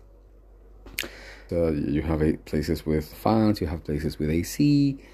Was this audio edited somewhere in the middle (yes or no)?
yes